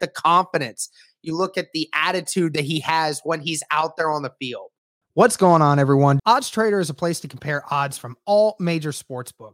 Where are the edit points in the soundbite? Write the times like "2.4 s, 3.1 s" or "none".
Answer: 5.0 s, 6.2 s

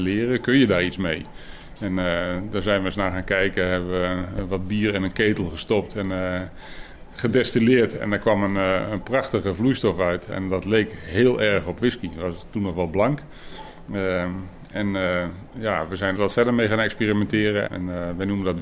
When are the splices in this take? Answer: 16.2 s, 17.7 s

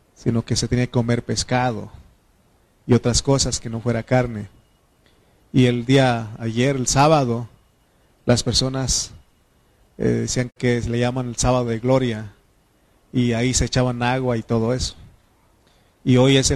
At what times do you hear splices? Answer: none

